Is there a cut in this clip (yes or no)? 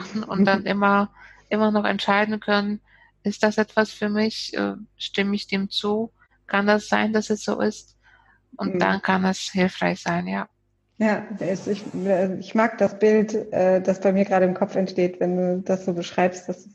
no